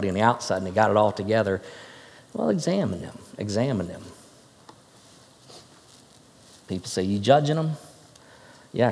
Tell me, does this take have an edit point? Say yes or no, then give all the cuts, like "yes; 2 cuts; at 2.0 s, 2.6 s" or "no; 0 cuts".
no; 0 cuts